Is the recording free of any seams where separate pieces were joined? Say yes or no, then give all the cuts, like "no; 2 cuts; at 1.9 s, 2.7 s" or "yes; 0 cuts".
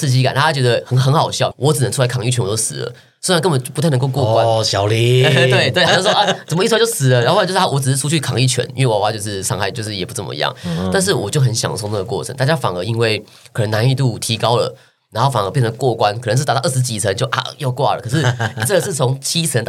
no; 2 cuts; at 1.5 s, 5.9 s